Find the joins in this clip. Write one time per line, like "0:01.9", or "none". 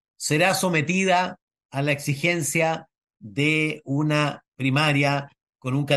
none